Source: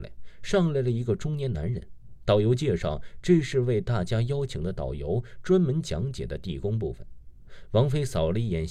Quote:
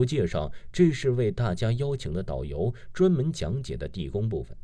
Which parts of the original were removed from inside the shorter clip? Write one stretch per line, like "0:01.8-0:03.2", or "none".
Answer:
none